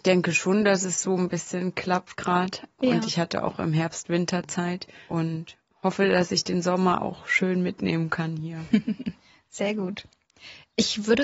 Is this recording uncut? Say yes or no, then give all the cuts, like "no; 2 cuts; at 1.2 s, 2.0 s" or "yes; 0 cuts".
yes; 0 cuts